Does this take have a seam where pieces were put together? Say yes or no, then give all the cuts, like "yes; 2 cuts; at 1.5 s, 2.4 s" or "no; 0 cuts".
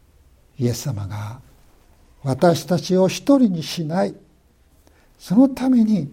no; 0 cuts